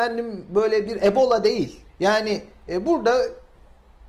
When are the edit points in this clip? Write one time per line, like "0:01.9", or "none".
0:01.9